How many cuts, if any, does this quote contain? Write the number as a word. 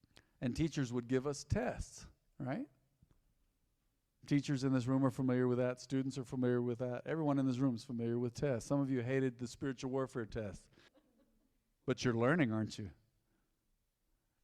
one